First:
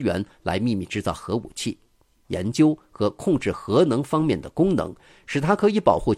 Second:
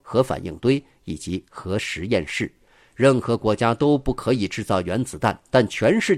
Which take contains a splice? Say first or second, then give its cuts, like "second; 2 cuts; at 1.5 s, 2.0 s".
first; 1 cut; at 2.2 s